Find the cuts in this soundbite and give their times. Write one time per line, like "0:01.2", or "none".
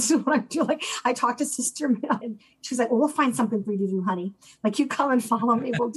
0:02.2